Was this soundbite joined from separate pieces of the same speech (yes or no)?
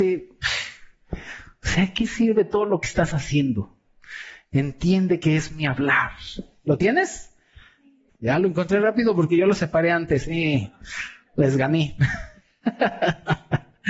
yes